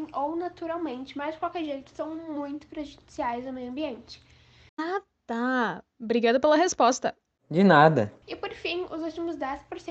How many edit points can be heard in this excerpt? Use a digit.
2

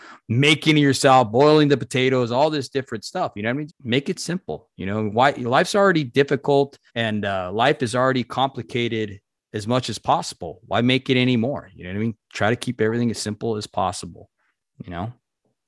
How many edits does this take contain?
2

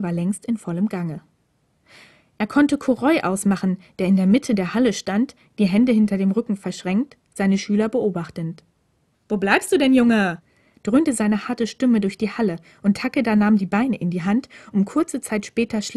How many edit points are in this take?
1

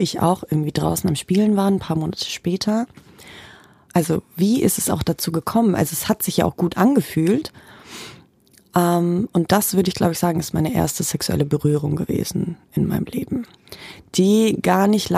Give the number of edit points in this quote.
1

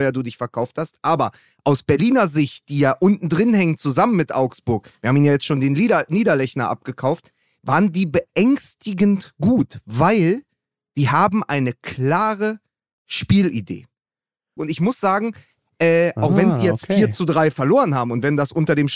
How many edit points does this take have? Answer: 1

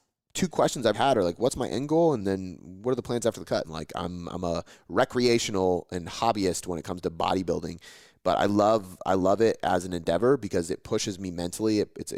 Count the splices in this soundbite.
2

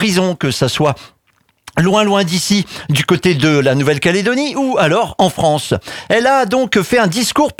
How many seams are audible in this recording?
0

